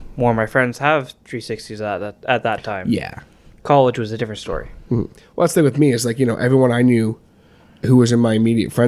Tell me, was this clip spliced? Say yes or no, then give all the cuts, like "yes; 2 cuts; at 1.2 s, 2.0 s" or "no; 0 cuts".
no; 0 cuts